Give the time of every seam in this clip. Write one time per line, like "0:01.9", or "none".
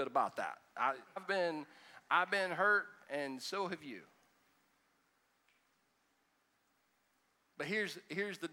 0:01.2